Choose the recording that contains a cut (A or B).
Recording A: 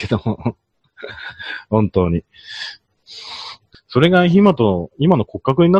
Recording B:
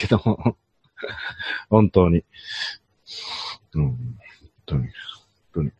A